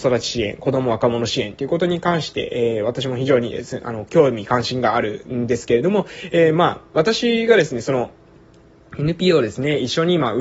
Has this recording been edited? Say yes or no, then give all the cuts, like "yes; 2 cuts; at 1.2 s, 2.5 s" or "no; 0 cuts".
no; 0 cuts